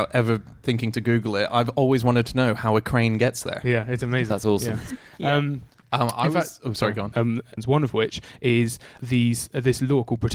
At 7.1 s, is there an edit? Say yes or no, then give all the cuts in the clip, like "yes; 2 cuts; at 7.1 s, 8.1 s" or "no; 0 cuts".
yes; 1 cut; at 7.1 s